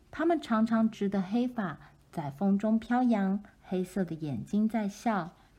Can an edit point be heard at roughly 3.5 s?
yes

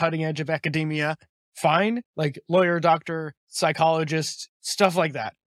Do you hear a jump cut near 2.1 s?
no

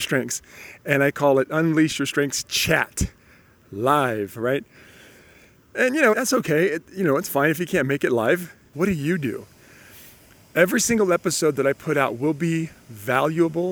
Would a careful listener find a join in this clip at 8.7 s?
yes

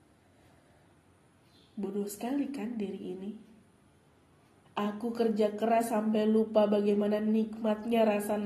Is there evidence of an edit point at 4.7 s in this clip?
yes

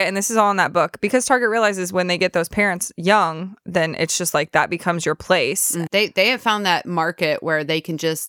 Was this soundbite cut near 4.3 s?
no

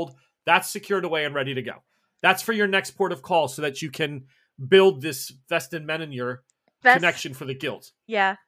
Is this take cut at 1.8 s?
no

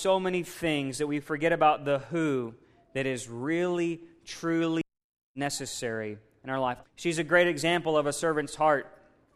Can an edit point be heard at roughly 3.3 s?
no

